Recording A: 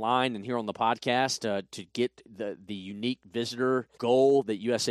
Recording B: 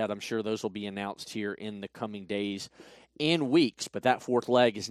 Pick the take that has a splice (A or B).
A